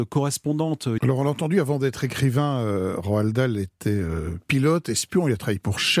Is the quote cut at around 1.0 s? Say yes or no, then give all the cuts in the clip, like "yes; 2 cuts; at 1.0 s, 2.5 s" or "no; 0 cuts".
yes; 1 cut; at 1.0 s